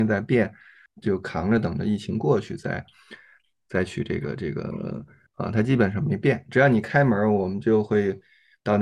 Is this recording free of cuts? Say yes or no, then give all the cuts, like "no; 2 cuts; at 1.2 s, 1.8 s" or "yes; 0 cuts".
no; 1 cut; at 5.3 s